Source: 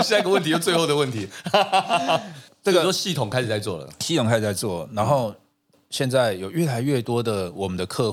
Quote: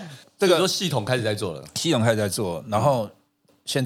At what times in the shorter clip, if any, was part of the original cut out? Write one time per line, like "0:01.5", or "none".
none